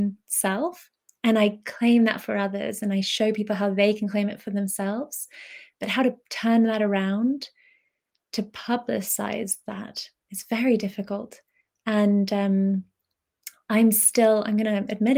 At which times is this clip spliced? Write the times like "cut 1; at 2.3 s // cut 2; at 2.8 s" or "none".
none